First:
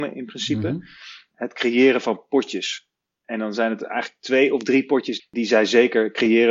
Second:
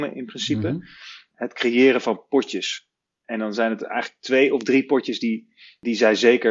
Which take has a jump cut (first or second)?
first